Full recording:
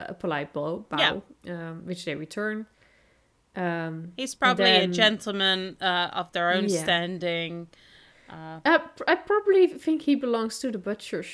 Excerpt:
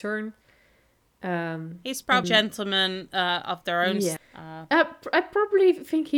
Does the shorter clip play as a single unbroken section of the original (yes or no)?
no